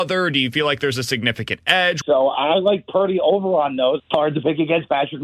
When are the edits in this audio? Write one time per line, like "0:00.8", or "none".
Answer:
0:02.0
0:04.0